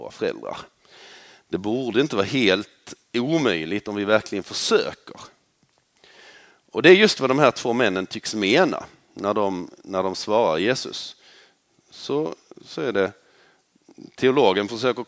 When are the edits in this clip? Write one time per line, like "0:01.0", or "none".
none